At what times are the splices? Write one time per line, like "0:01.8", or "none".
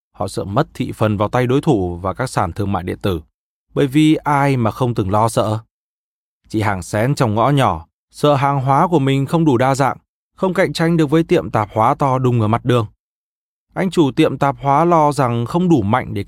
0:03.7